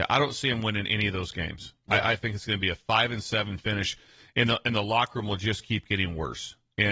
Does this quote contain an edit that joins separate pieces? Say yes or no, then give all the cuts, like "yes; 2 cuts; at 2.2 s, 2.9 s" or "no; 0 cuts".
no; 0 cuts